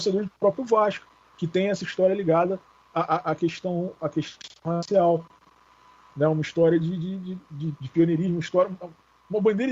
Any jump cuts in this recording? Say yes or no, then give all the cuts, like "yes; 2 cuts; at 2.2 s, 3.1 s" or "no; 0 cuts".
no; 0 cuts